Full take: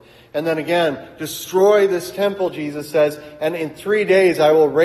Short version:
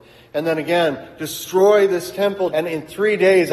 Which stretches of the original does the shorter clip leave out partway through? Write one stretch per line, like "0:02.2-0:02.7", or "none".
0:02.5-0:03.4